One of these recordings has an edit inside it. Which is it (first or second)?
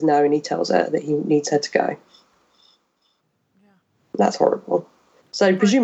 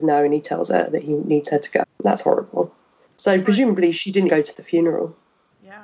second